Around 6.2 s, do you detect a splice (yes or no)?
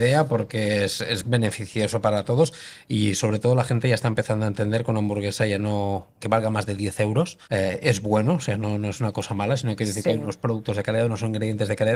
yes